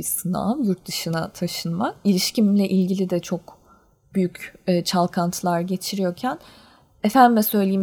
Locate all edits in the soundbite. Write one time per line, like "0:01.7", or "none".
none